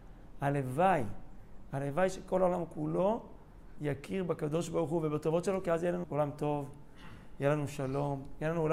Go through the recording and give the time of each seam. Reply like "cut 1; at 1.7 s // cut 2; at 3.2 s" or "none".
cut 1; at 6.0 s